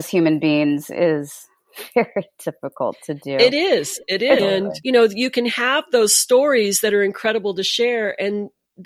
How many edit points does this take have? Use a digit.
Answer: 1